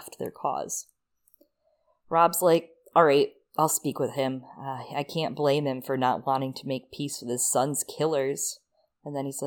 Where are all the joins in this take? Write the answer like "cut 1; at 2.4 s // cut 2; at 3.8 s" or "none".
none